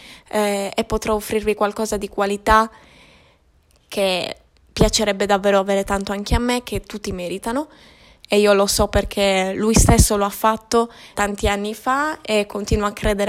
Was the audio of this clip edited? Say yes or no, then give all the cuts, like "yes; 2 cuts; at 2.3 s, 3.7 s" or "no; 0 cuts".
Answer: yes; 2 cuts; at 8.2 s, 11.1 s